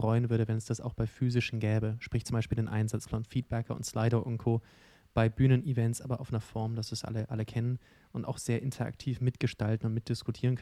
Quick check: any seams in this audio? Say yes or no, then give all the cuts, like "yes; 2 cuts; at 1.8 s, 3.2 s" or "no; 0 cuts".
no; 0 cuts